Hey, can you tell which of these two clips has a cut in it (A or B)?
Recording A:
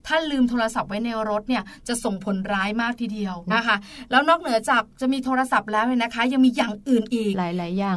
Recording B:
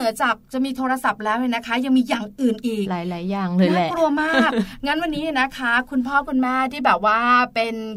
A